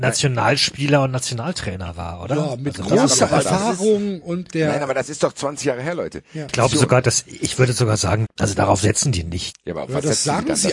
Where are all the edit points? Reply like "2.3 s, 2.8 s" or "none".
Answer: 6.5 s, 8.3 s, 9.5 s